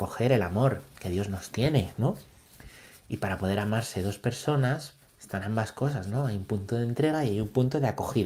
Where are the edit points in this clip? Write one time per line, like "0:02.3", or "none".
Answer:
0:05.0